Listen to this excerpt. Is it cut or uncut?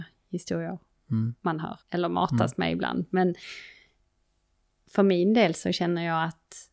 cut